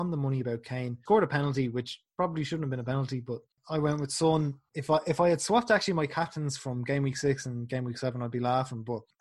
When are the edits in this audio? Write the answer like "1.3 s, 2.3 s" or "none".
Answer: none